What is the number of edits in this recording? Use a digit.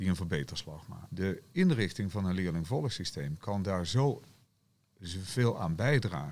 1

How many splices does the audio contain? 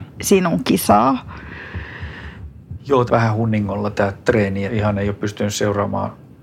2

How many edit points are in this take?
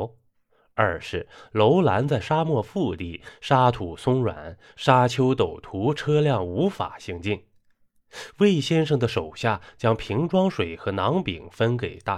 0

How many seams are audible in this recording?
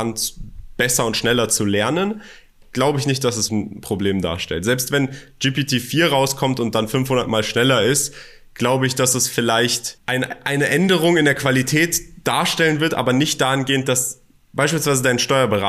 1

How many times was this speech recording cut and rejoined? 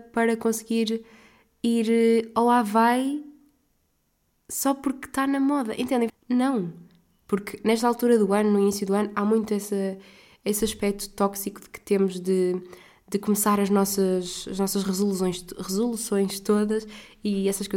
1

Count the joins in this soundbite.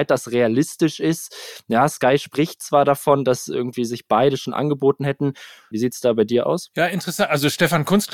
1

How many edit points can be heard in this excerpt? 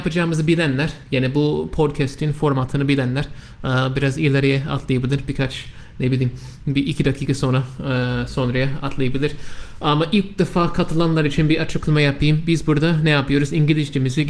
0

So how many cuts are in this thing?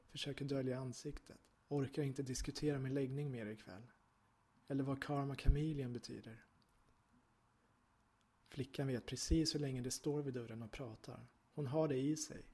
0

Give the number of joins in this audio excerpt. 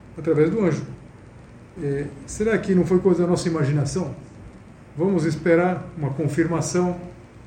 1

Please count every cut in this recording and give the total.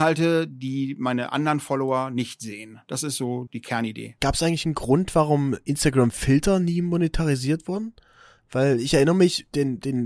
1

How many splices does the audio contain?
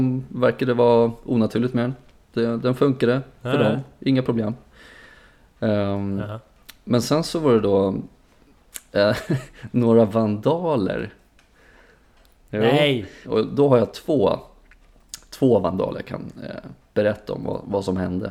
1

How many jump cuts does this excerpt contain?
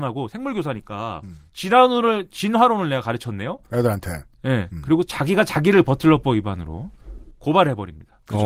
0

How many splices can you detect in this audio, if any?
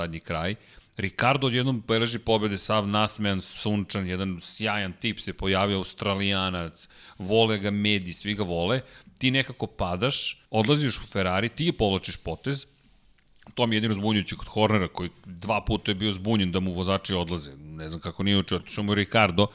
2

